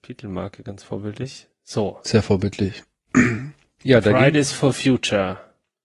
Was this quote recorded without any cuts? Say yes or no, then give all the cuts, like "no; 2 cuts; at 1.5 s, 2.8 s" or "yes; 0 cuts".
yes; 0 cuts